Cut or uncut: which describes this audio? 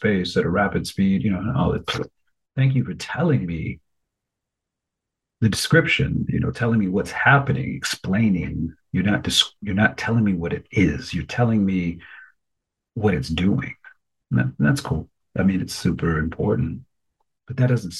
uncut